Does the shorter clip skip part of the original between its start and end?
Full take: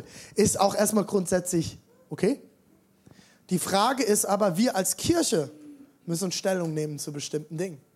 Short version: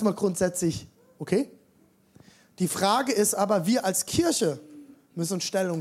no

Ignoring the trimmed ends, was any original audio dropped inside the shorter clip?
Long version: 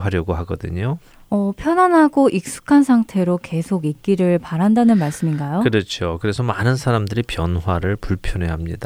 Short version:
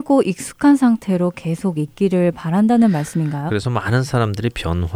yes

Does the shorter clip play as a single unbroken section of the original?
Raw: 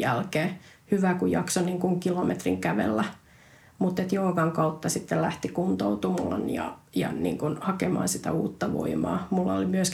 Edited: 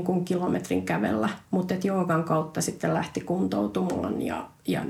no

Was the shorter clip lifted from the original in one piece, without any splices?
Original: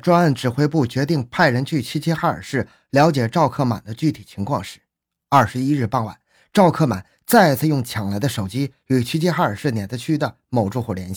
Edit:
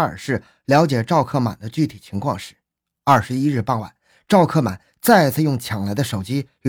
yes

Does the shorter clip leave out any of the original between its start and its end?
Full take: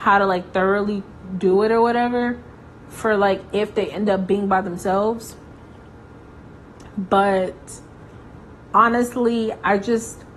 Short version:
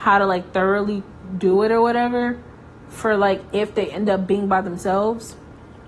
no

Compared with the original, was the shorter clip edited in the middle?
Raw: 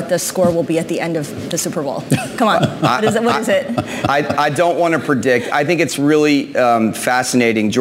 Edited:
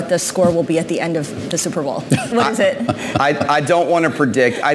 yes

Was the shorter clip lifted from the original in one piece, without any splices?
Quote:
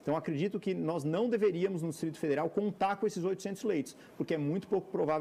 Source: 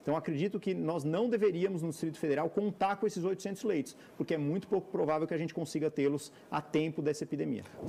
yes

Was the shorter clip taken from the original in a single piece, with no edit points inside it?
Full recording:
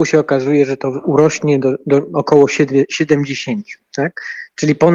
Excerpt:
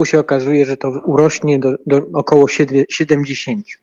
yes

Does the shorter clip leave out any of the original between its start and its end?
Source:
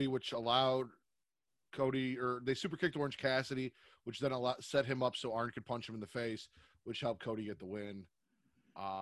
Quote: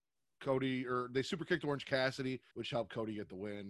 yes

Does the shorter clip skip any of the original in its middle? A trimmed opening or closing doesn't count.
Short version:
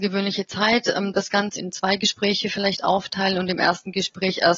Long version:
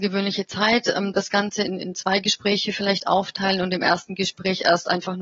yes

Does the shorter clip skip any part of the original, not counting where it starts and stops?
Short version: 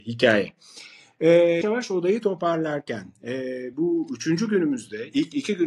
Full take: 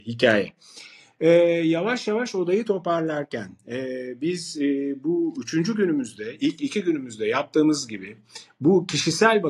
yes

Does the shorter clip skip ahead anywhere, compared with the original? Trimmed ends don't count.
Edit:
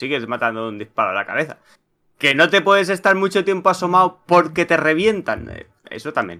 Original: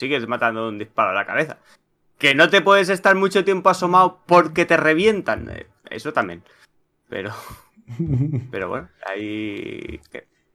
no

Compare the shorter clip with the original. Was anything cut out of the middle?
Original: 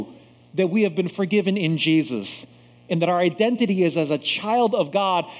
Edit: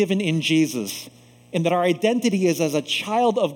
no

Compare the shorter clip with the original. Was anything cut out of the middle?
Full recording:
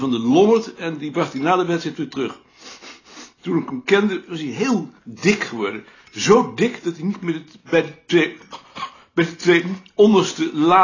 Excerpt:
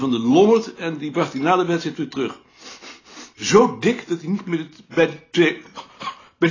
yes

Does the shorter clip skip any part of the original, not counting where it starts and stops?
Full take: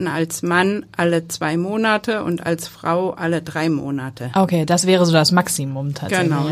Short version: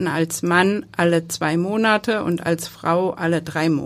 no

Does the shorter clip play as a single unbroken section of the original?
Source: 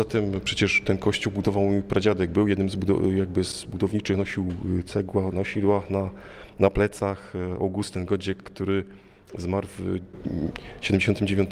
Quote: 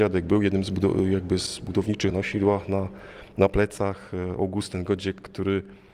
no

